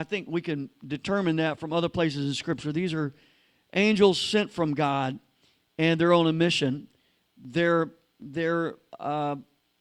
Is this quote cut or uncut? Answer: uncut